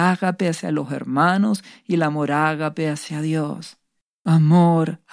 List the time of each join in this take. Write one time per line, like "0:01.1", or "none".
0:04.0